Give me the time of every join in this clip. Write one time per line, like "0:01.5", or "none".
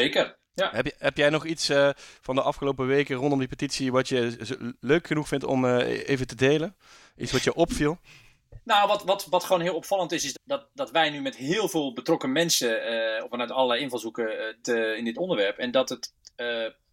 0:10.3
0:13.3
0:14.6